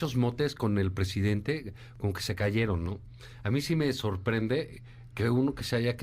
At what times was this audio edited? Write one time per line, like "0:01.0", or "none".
none